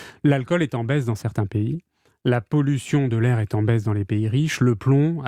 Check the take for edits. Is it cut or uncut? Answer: uncut